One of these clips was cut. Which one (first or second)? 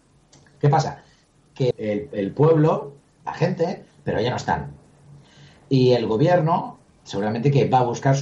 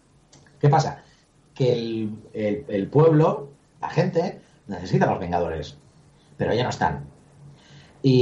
first